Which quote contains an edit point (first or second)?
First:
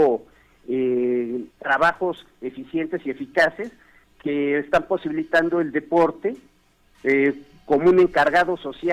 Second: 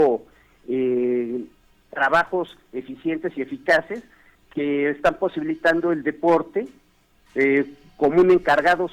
first